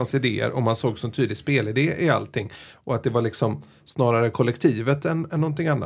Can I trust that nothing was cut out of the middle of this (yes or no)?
yes